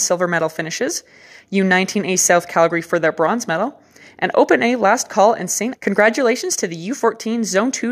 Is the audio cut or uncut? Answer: cut